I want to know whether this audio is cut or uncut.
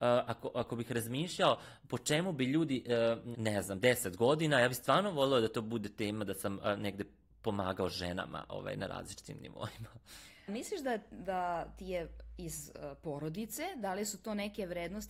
cut